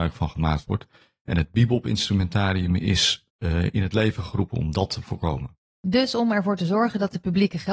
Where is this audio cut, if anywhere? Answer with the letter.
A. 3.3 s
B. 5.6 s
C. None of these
A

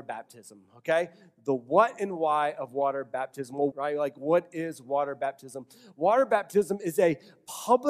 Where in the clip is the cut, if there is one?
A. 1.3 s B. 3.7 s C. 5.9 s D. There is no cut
B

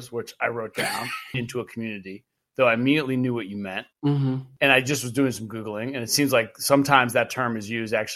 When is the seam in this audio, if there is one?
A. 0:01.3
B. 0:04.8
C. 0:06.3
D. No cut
A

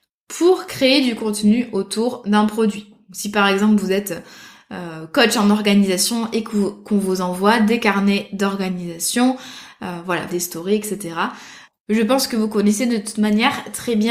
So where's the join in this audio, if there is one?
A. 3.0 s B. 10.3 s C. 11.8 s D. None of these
B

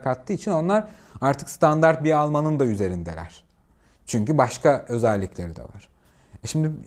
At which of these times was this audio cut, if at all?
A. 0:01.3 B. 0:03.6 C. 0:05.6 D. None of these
D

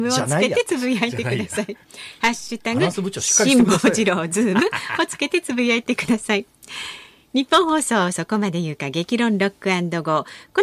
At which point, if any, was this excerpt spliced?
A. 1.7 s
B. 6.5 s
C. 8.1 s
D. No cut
C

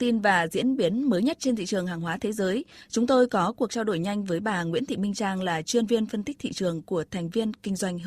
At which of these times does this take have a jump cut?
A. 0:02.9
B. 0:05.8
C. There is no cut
C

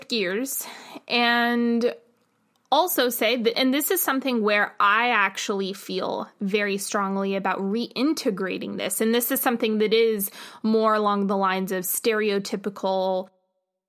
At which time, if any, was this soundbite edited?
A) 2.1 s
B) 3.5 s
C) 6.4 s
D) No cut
B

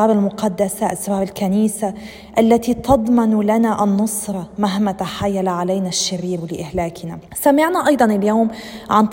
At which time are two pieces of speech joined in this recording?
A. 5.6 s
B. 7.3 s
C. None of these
B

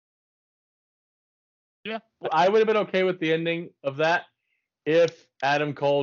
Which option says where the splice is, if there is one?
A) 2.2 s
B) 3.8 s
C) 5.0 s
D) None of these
A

